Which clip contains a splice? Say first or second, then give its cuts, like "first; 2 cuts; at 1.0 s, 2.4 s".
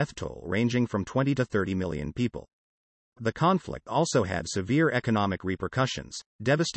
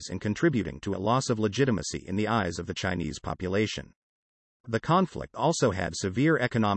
first; 1 cut; at 3.1 s